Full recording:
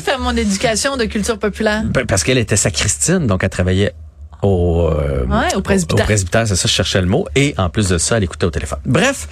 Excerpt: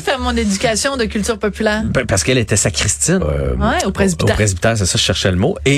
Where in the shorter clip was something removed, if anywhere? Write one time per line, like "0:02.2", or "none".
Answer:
0:03.2